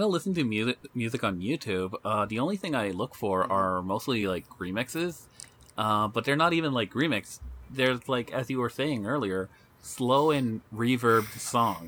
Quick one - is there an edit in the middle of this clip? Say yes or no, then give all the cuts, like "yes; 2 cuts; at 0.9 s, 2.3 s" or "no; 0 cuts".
no; 0 cuts